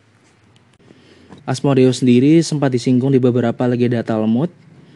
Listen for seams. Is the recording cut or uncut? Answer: cut